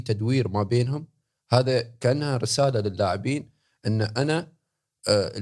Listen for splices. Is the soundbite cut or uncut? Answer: uncut